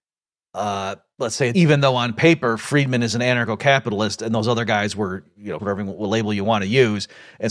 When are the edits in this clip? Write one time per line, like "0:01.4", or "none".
0:01.5
0:05.6